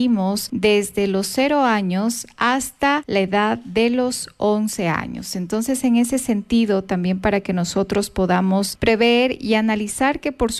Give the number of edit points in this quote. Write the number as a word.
zero